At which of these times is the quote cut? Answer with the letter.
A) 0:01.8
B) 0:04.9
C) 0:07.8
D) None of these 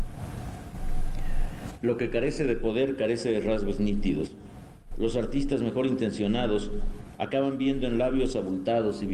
A